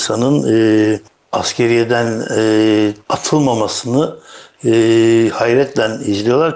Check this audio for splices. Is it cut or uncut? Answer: cut